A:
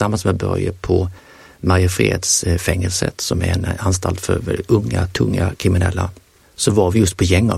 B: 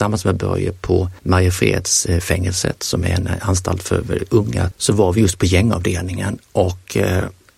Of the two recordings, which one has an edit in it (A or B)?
B